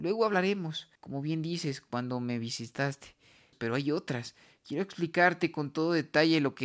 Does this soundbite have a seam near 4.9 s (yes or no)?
no